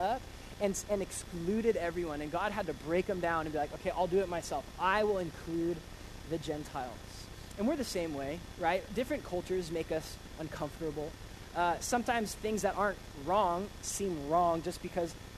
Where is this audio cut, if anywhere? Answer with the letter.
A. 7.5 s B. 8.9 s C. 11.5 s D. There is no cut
D